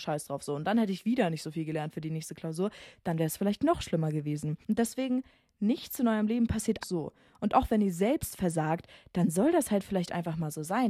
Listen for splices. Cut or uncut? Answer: cut